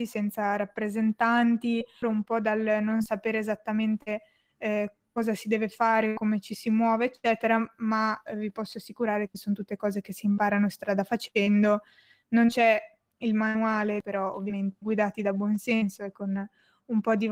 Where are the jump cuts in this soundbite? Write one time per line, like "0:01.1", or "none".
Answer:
0:02.0